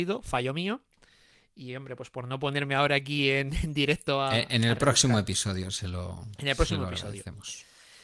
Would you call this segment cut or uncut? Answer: uncut